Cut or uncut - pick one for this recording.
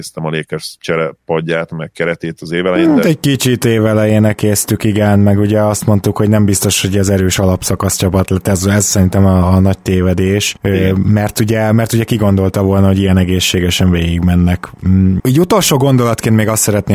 cut